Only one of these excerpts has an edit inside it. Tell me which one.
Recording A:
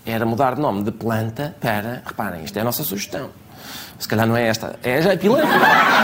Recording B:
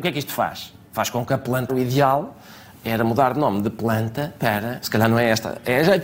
B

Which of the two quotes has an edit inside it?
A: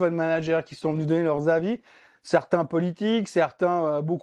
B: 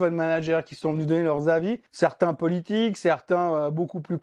B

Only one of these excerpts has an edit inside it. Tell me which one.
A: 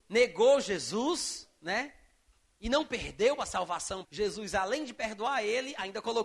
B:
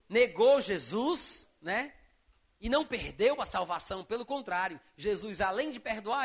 A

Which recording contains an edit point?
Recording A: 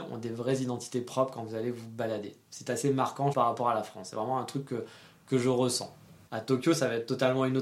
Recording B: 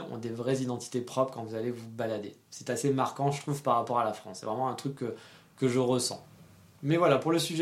A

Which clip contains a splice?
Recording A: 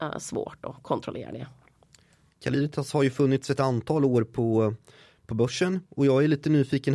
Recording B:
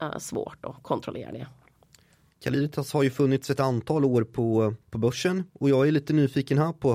B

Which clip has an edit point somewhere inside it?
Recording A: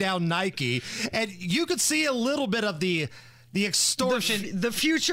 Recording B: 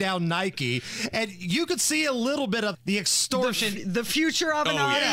B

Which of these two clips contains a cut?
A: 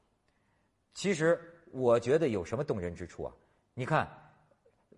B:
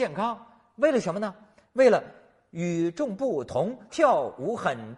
B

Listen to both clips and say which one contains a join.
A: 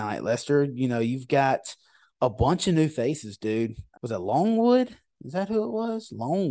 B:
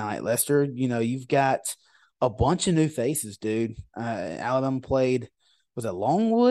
A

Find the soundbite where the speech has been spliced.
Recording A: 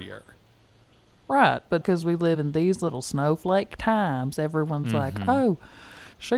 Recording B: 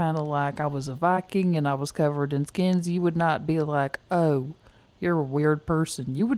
A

